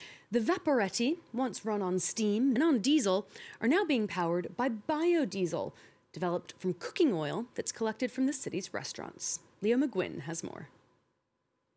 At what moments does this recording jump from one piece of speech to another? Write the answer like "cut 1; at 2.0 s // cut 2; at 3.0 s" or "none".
cut 1; at 2.6 s